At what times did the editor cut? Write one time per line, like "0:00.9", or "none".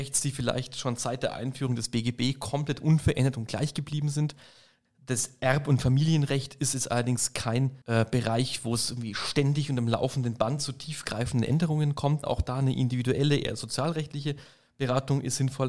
0:04.8
0:07.8
0:12.2